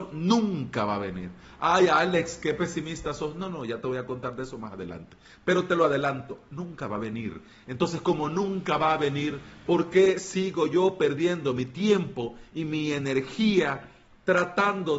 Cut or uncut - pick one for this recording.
uncut